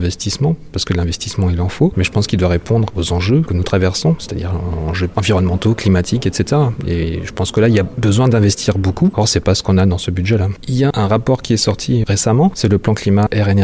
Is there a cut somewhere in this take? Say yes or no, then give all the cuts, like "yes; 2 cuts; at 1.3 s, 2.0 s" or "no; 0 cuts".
no; 0 cuts